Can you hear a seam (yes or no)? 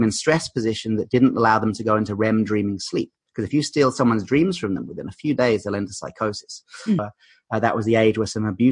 yes